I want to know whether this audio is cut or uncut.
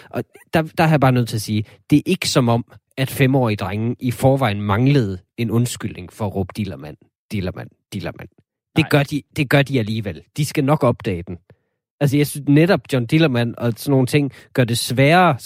uncut